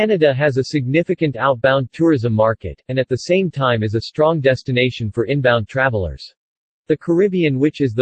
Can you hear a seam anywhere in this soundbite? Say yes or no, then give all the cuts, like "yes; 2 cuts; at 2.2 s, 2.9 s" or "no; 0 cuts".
yes; 1 cut; at 6.7 s